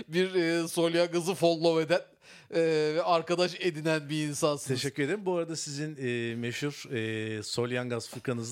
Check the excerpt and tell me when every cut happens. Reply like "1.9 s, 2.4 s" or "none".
none